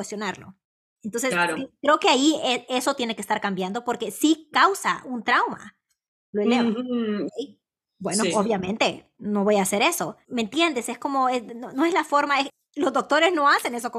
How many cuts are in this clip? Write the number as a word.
one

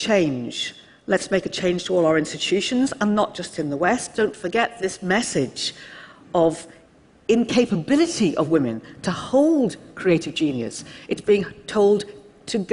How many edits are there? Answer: zero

